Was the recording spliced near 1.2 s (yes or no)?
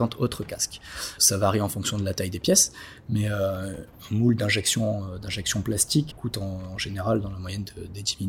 yes